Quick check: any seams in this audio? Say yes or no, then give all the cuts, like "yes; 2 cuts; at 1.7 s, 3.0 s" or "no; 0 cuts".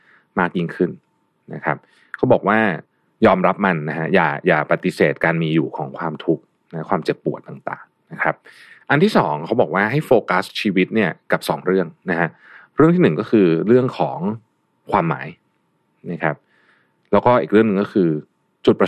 no; 0 cuts